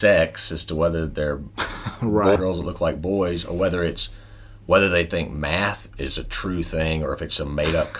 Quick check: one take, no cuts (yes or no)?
no